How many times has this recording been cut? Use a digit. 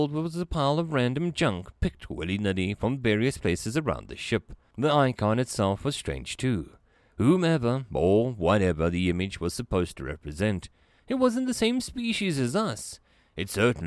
1